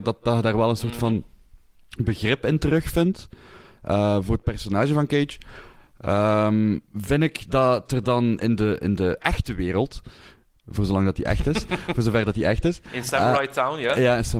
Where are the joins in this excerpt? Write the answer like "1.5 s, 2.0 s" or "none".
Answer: 6.8 s